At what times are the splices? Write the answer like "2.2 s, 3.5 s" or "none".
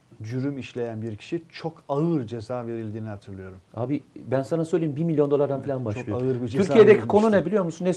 3.7 s